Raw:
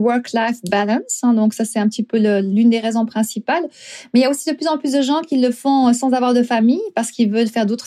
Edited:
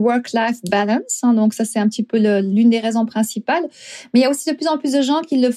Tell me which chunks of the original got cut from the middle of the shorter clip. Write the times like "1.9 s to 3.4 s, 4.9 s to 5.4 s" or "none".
none